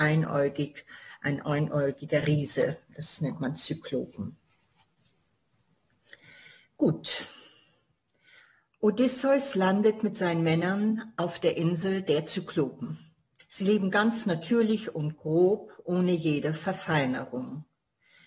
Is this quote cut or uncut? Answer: cut